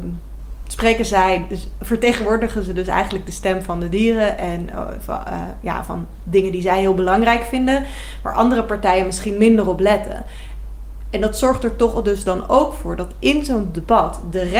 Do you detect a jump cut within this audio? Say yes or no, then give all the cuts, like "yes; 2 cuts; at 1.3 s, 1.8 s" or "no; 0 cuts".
no; 0 cuts